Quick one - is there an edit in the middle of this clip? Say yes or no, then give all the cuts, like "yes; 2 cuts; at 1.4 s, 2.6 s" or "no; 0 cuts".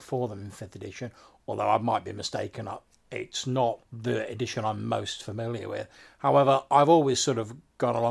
yes; 1 cut; at 3.9 s